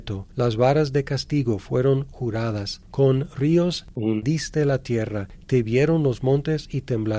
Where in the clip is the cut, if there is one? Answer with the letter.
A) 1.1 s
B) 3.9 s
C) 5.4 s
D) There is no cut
D